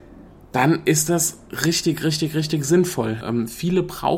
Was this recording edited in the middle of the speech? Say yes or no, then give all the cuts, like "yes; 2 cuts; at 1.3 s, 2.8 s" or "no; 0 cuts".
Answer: yes; 1 cut; at 3.2 s